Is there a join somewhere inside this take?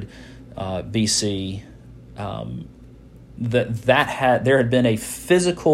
no; 0 cuts

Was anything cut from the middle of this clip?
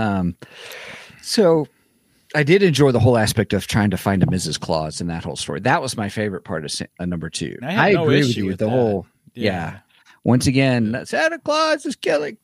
yes; 1 cut; at 7.6 s

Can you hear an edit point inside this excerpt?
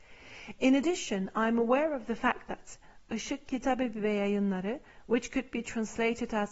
no; 0 cuts

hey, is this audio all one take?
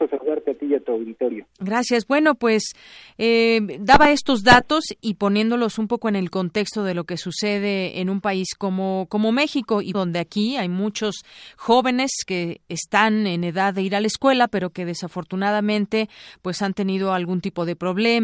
no; 1 cut; at 9.9 s

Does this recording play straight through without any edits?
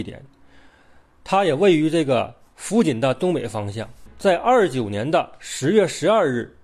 yes; 0 cuts

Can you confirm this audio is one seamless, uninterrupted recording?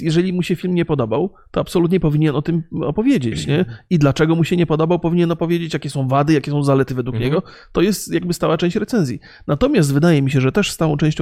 yes; 0 cuts

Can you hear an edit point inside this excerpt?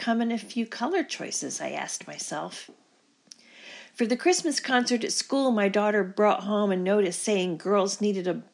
no; 0 cuts

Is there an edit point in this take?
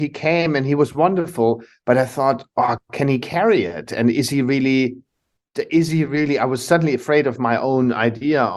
no; 0 cuts

